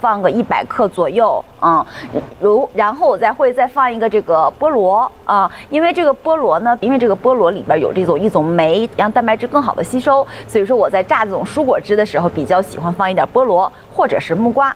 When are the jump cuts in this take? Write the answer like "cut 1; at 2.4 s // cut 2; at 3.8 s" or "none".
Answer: cut 1; at 6.8 s // cut 2; at 8.9 s